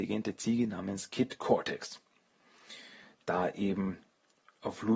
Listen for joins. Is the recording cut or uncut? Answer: cut